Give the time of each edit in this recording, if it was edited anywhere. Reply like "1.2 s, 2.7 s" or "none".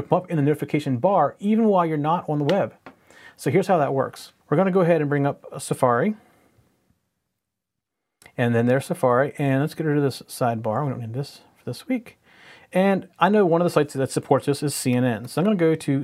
4.4 s